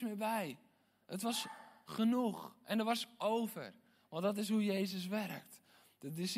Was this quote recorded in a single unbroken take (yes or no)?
yes